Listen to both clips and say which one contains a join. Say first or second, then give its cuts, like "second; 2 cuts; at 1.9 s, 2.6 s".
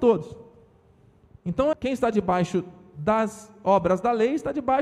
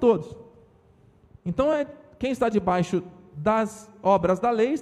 first; 1 cut; at 1.7 s